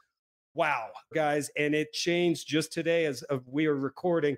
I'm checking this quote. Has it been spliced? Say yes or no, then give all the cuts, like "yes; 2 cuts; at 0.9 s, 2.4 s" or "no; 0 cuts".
yes; 1 cut; at 1.1 s